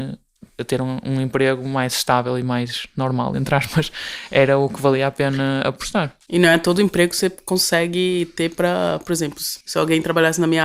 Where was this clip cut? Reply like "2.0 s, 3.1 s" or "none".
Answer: 9.6 s